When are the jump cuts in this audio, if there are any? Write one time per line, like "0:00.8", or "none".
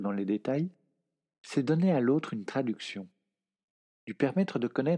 none